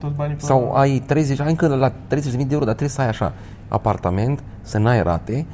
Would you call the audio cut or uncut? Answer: uncut